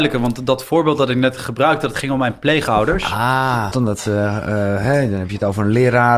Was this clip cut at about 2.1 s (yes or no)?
no